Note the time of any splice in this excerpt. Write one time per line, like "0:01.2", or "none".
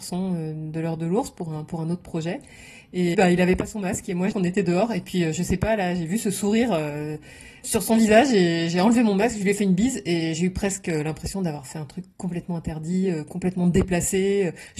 0:03.1
0:04.3